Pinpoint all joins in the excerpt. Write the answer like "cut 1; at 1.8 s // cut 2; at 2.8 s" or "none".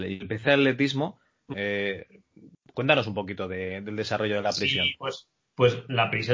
cut 1; at 1.5 s